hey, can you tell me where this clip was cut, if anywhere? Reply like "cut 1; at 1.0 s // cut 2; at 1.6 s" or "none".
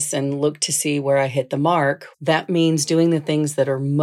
cut 1; at 2.1 s